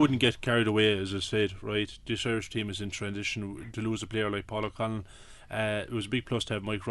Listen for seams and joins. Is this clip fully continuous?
yes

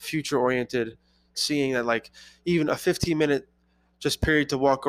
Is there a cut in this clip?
yes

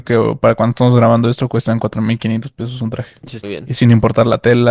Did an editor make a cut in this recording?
yes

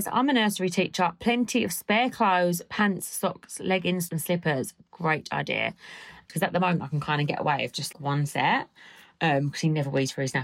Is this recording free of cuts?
no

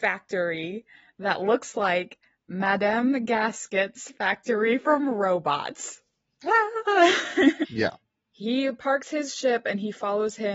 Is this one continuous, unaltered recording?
no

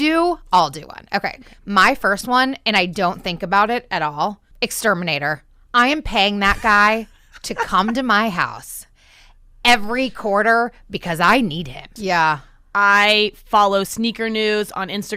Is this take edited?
yes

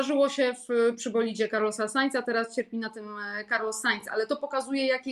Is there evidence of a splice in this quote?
no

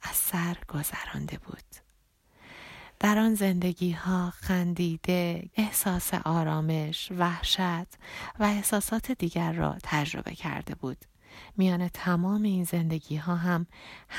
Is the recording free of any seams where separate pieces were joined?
no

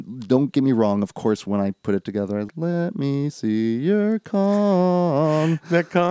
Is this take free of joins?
no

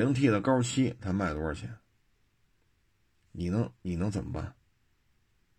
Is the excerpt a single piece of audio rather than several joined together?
yes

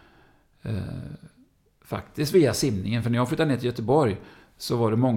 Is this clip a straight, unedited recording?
yes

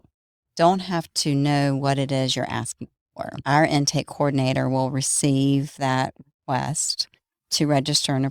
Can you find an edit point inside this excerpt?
no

